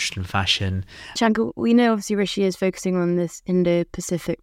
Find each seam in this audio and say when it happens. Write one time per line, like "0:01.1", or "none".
0:01.2